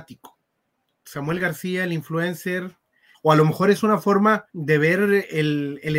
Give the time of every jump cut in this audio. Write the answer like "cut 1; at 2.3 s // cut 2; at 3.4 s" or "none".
cut 1; at 3.1 s // cut 2; at 4.5 s